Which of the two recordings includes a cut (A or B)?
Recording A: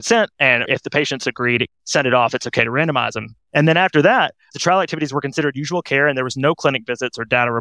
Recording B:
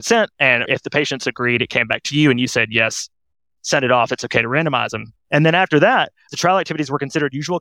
A